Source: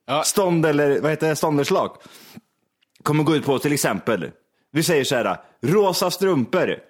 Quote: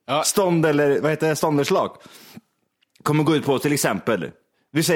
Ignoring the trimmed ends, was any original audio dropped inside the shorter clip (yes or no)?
no